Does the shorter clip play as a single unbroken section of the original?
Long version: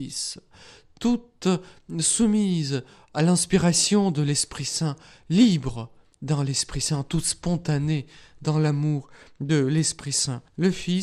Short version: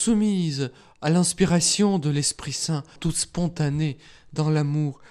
no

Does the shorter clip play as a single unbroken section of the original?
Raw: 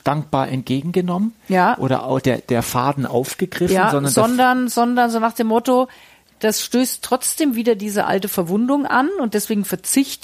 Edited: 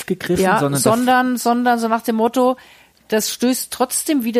yes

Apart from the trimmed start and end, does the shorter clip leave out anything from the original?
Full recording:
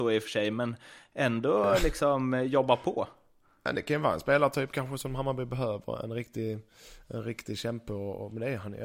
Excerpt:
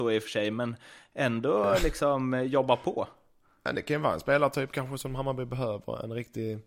no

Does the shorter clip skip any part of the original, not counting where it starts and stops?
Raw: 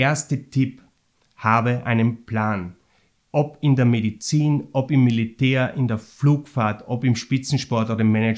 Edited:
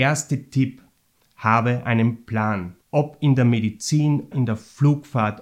yes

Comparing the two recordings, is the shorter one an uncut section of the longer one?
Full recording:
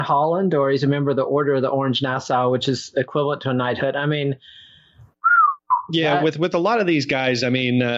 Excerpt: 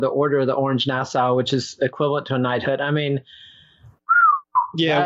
yes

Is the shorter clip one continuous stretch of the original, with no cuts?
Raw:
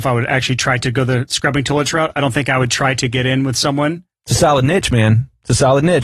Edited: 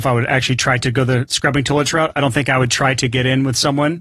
yes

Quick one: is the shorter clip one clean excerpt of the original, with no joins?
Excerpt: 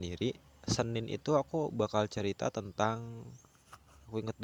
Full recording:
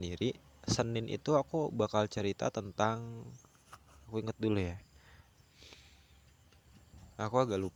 yes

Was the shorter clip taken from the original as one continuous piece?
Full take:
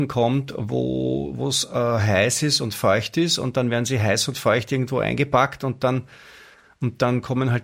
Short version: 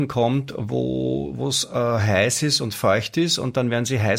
yes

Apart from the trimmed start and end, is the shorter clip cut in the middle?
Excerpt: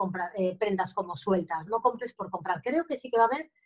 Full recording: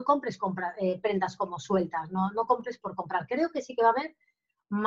yes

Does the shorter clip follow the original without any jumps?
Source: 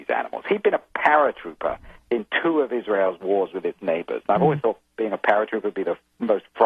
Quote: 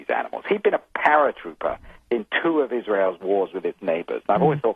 yes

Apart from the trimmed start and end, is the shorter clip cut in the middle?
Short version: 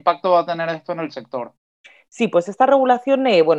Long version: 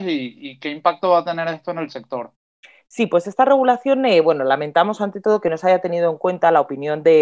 no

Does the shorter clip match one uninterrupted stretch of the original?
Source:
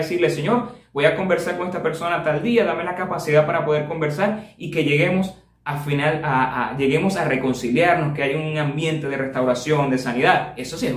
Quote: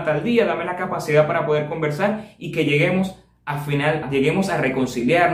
no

